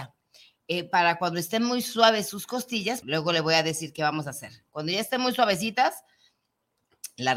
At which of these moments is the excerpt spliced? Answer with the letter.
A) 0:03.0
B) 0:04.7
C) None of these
A